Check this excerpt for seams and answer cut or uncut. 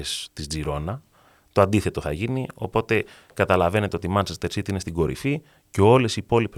uncut